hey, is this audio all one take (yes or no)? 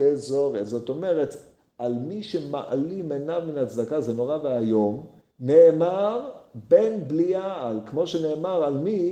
yes